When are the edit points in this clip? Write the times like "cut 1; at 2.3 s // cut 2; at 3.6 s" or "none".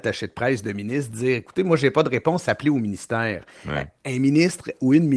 none